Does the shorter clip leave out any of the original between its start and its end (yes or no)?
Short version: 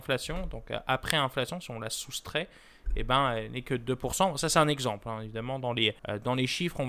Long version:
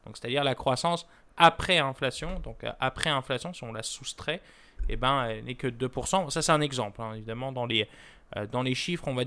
yes